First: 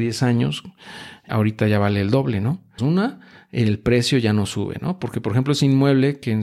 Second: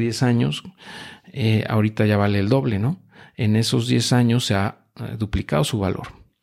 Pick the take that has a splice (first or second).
first